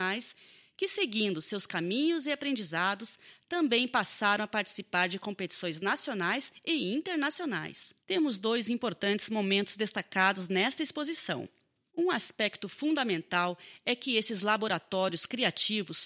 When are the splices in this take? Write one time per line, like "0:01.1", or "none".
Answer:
0:08.0
0:11.9